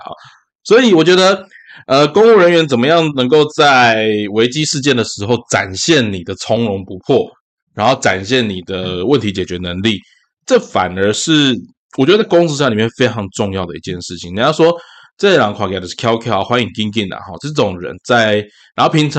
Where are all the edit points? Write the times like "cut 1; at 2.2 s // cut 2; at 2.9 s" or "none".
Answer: none

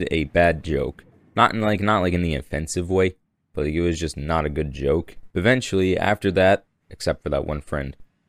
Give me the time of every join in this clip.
cut 1; at 5.3 s // cut 2; at 6.8 s

